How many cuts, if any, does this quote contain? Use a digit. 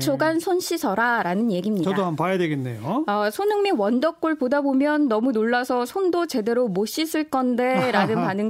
0